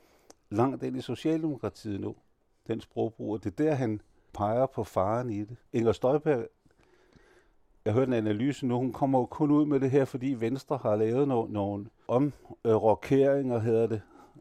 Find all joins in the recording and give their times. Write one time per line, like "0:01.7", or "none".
0:05.7